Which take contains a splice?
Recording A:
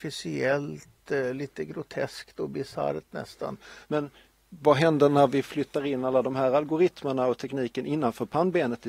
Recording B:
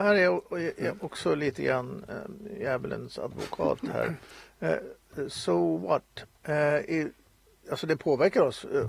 A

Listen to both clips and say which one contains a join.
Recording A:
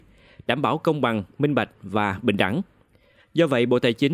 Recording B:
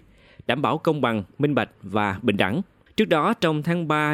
B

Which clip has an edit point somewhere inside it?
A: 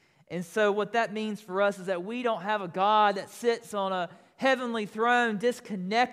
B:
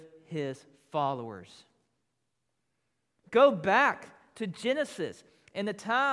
B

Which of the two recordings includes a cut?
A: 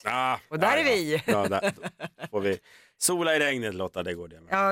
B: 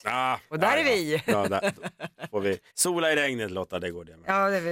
B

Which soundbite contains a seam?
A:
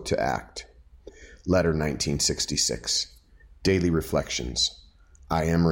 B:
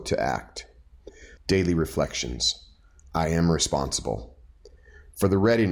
B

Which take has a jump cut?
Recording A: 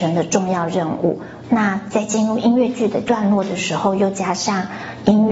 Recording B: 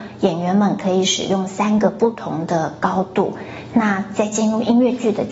A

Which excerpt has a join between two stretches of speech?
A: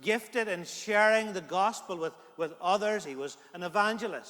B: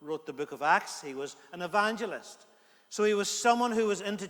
A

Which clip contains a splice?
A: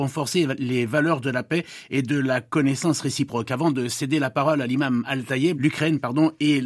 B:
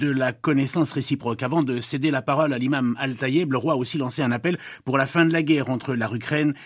A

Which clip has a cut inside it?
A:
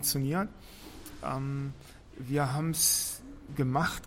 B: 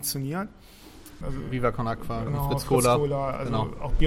B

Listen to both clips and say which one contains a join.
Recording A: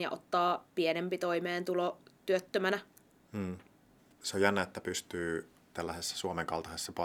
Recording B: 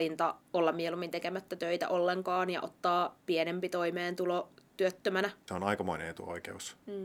B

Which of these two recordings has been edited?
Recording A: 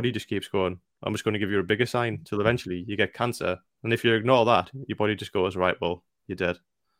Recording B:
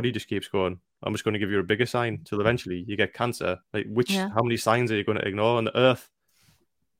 B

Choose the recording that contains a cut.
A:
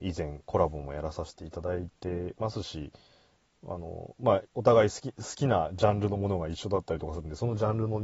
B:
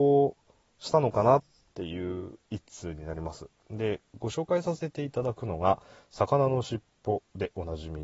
A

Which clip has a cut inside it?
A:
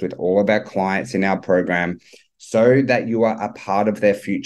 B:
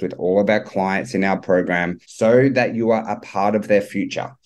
B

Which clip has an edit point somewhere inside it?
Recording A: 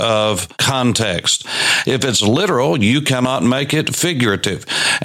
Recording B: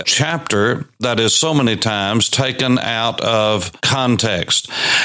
A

